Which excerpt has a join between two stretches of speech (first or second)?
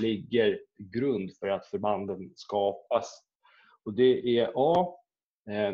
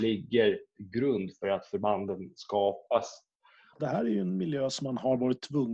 second